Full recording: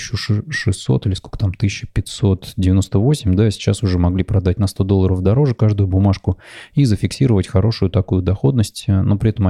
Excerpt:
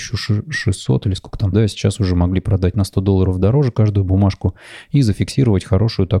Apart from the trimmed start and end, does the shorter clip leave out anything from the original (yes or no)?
yes